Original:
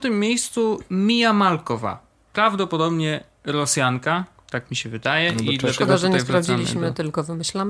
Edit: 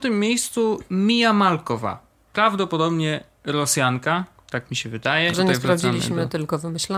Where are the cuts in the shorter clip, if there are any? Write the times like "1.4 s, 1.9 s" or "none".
5.3 s

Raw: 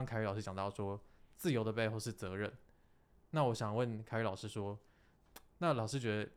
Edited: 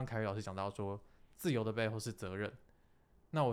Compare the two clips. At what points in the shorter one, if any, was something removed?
none

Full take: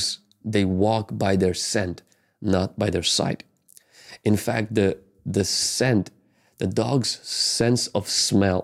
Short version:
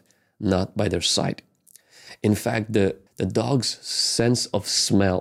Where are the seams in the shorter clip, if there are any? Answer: 3.1 s

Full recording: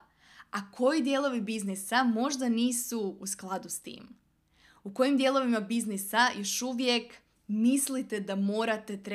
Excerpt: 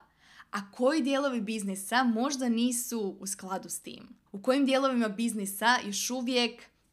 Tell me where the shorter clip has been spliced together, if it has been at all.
4.3 s

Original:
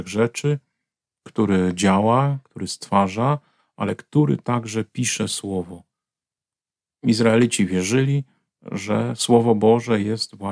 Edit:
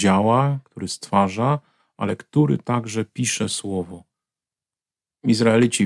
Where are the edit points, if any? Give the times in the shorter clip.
none

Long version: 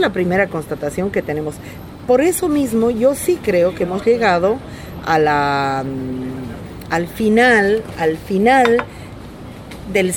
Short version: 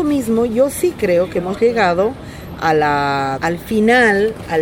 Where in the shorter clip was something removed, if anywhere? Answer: 3.4 s

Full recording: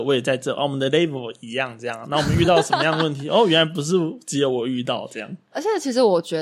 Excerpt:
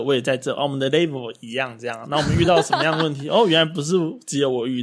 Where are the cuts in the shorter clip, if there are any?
none

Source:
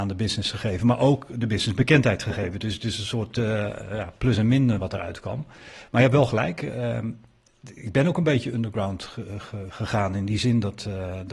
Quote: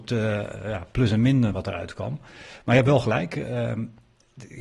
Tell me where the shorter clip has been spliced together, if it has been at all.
none

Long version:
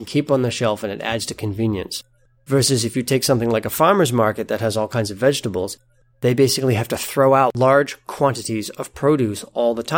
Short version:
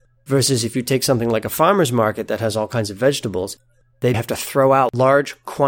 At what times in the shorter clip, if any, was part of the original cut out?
4.1 s

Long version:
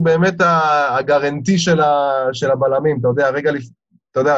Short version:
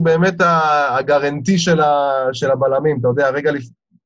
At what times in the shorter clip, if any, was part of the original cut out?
none

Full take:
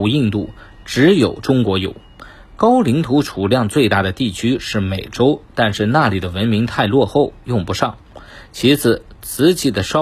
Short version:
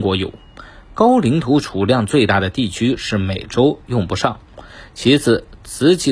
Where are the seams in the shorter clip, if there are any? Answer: 3.8 s

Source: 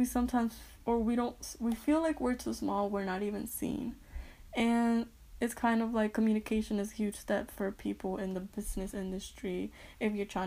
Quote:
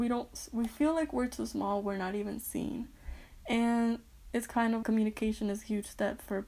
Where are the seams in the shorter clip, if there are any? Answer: 4.8 s

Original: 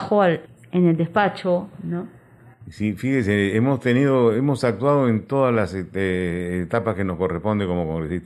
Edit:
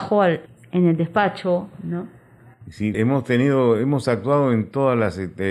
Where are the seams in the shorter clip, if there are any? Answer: 2.9 s

